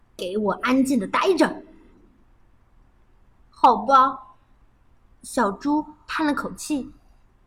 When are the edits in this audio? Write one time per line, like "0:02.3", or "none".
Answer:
none

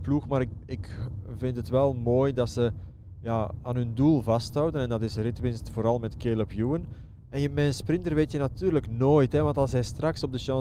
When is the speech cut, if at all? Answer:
0:07.2

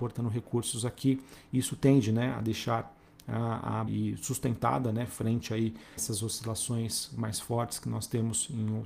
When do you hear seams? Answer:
0:03.9
0:06.0

